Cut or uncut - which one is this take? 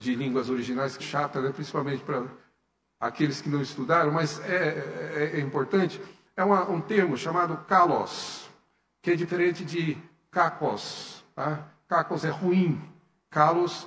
cut